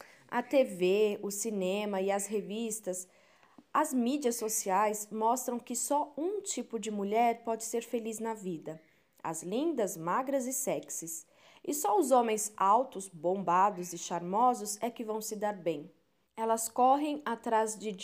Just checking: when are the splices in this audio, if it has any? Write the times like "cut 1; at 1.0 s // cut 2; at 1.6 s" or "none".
cut 1; at 16.2 s